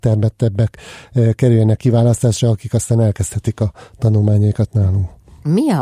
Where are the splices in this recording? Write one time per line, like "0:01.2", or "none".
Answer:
none